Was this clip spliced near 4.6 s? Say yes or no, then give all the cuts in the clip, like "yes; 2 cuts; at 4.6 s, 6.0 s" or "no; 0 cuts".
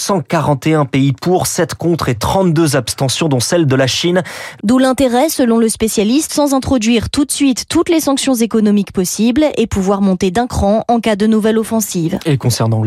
yes; 2 cuts; at 4.6 s, 6.3 s